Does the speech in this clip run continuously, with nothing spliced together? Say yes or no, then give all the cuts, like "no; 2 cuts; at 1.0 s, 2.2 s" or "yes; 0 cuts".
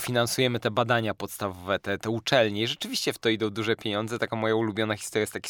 yes; 0 cuts